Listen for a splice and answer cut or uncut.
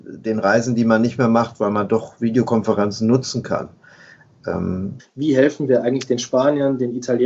cut